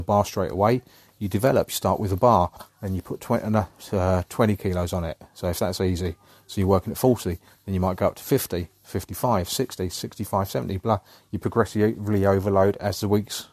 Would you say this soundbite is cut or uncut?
uncut